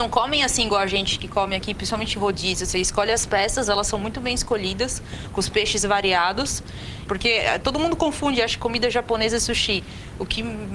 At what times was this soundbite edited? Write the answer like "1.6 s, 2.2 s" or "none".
7.1 s

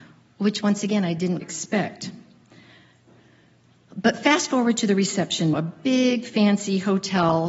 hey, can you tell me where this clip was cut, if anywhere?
1.4 s, 5.5 s

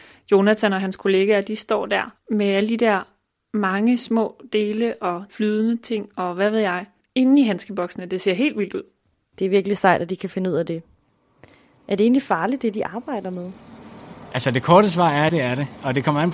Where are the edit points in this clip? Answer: 15.3 s

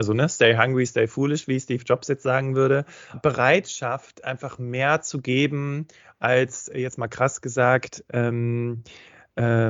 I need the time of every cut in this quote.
3.1 s

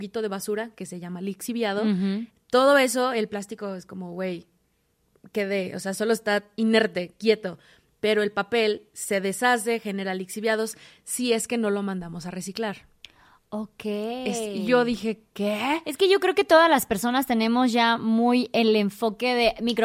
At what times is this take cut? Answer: none

